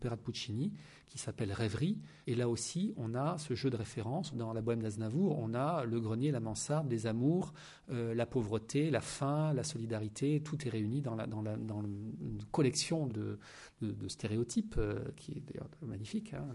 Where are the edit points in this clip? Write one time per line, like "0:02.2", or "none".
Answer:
0:02.2
0:04.3
0:13.1